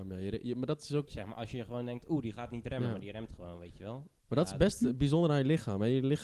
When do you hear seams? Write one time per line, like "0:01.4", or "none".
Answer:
0:01.1